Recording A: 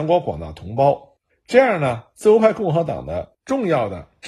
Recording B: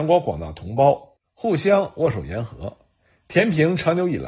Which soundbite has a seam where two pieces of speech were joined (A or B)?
A